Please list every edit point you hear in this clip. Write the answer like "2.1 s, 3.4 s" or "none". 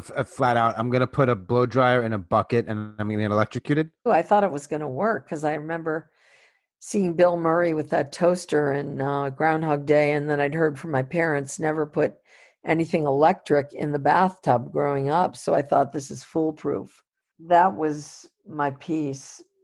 4.1 s, 17.3 s

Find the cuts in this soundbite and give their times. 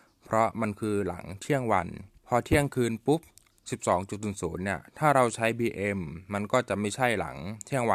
2.2 s

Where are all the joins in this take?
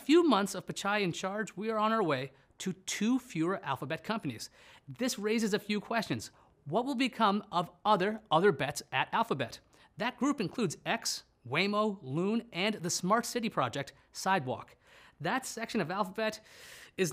none

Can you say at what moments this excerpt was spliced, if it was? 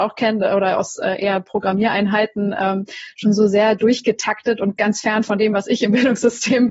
4.8 s

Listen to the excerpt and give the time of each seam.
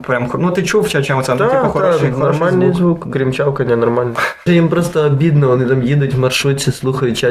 4.5 s

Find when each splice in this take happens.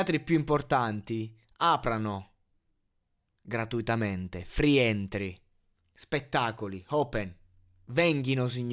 5.8 s

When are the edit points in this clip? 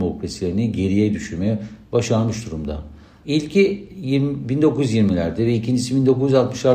3.2 s

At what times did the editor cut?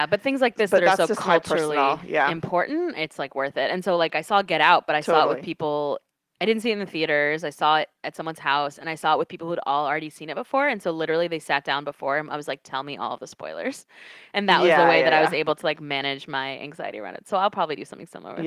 none

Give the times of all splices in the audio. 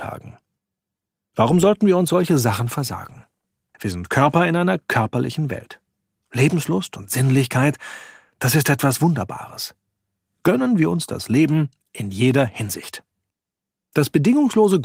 3.7 s

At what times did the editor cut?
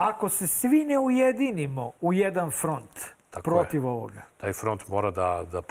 none

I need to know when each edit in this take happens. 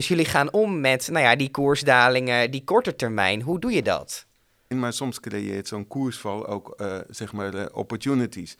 4.7 s

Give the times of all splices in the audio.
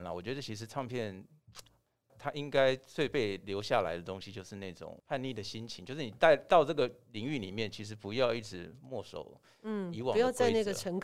2.1 s

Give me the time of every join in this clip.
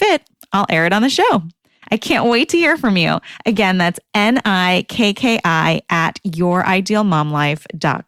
none

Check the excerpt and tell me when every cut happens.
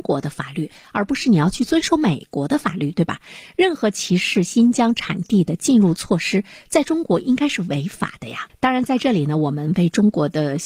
8.5 s

